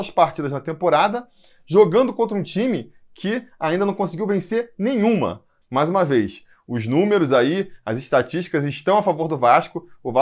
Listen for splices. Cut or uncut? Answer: uncut